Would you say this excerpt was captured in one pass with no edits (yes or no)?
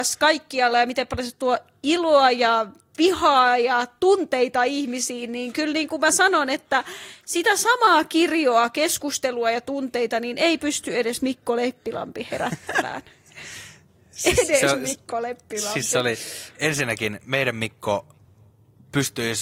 yes